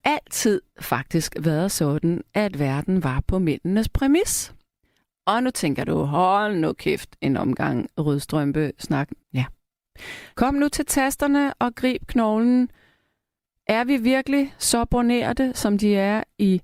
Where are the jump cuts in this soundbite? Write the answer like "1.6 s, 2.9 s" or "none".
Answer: 9.2 s, 10.3 s